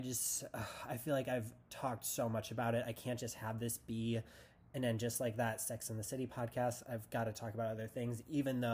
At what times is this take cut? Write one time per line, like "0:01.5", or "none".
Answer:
none